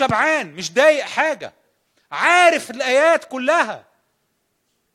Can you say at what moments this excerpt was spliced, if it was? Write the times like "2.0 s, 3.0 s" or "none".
none